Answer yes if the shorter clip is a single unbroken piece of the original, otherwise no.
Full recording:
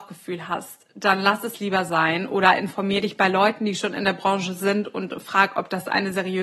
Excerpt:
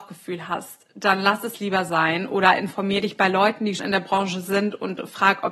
no